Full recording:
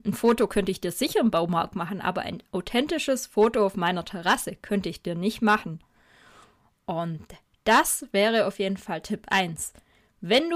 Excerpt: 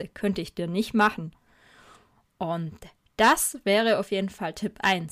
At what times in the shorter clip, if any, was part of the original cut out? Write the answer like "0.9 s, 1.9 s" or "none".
none